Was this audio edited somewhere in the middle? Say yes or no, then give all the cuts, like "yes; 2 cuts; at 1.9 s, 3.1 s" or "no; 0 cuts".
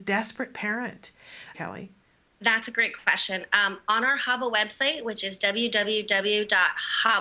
yes; 1 cut; at 1.5 s